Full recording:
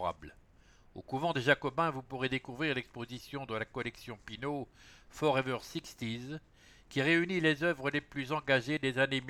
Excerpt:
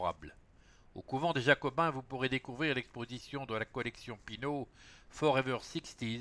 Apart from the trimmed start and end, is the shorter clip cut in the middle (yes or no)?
no